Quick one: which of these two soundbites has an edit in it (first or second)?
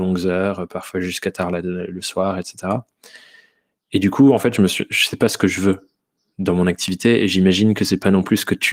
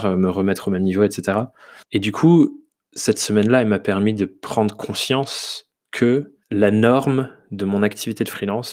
second